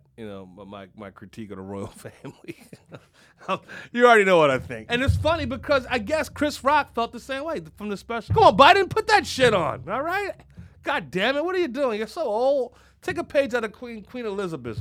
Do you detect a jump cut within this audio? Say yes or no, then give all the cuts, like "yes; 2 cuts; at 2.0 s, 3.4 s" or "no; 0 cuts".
yes; 2 cuts; at 4.9 s, 8.3 s